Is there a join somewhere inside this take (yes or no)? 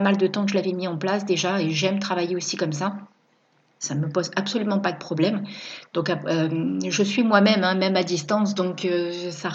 no